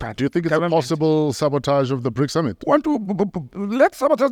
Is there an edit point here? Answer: no; 0 cuts

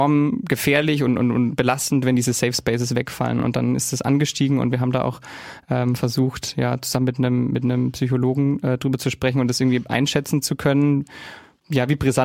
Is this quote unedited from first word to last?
yes; 0 cuts

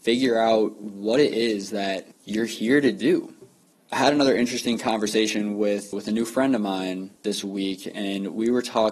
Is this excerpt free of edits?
no; 2 cuts; at 5.9 s, 7.2 s

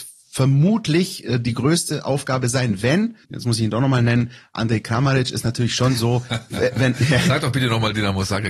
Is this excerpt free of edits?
no; 1 cut; at 3.2 s

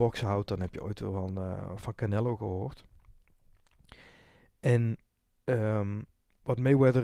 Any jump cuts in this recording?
no; 0 cuts

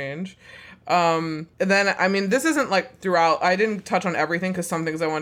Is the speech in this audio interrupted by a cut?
yes; 1 cut; at 1.5 s

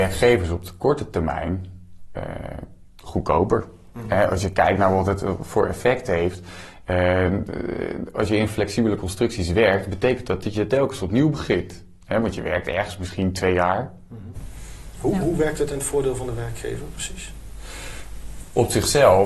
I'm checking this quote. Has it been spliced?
yes; 1 cut; at 14.3 s

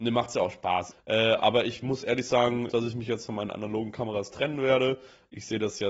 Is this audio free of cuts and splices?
no; 2 cuts; at 0.9 s, 2.7 s

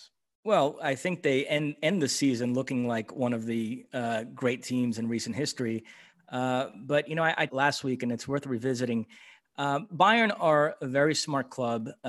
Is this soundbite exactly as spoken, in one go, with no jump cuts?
no; 1 cut; at 7.5 s

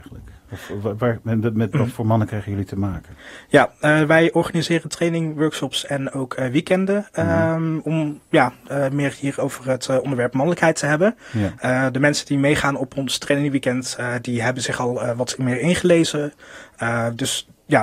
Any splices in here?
no; 0 cuts

